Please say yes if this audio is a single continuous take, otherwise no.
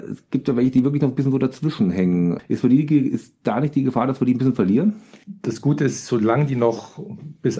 yes